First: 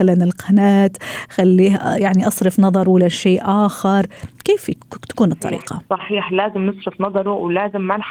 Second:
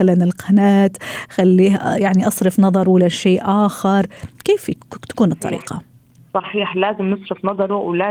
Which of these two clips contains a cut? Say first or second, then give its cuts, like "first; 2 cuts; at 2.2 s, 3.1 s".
first; 1 cut; at 5.9 s